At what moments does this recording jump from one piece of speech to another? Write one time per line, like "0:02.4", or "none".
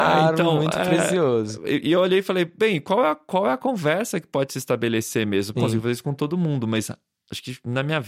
0:05.5